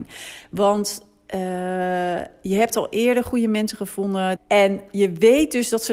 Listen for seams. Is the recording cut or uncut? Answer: cut